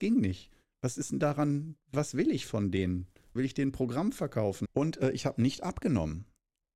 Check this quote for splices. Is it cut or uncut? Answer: cut